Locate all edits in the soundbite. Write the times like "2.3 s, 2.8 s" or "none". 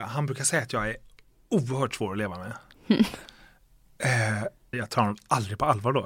4.7 s